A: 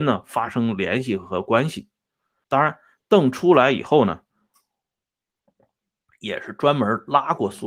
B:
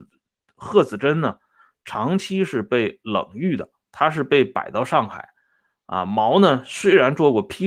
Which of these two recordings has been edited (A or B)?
A